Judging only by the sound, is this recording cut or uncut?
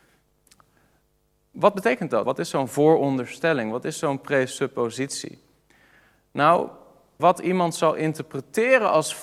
cut